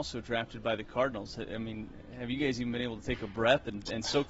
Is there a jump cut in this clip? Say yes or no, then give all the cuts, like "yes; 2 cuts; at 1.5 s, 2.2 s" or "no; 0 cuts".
no; 0 cuts